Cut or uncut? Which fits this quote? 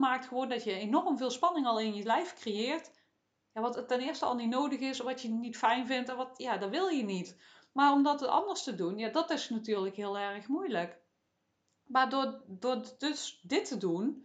uncut